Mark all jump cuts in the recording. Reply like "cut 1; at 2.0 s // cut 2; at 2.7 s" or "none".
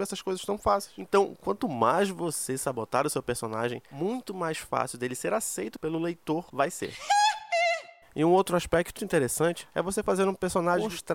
cut 1; at 9.0 s